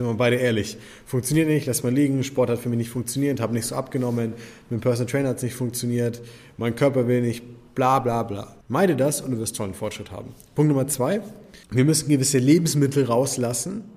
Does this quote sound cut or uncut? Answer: cut